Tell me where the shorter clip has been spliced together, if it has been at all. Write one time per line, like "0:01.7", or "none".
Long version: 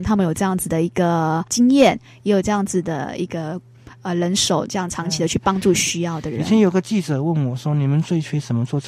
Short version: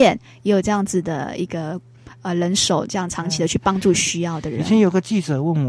none